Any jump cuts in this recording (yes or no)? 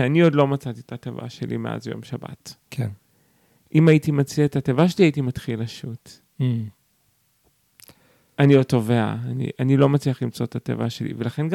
no